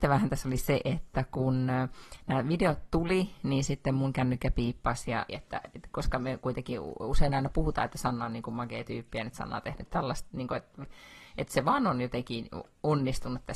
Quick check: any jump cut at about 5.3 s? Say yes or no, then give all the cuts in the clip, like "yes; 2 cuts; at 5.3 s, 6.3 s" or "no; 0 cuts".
yes; 1 cut; at 5.3 s